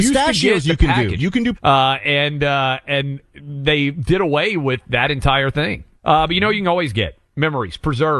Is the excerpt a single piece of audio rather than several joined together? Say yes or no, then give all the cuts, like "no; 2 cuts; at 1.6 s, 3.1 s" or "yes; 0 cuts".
no; 2 cuts; at 1.5 s, 6.0 s